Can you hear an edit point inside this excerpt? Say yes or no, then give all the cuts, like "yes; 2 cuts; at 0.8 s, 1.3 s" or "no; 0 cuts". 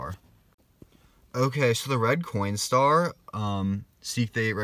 no; 0 cuts